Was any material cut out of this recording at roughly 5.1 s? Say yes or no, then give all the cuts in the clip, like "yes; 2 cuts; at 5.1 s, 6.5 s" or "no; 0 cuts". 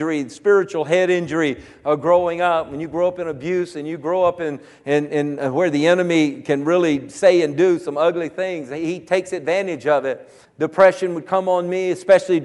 no; 1 cut; at 10.4 s